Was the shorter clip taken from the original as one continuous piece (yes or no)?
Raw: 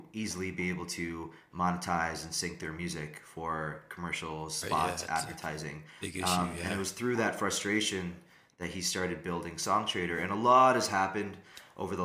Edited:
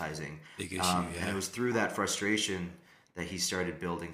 yes